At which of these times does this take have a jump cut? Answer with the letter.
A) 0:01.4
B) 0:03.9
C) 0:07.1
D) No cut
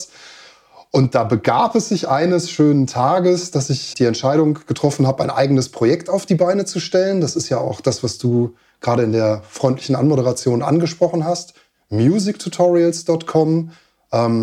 B